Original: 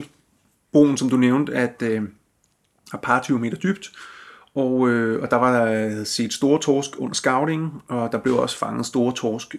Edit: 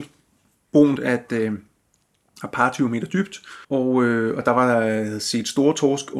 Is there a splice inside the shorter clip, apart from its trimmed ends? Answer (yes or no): yes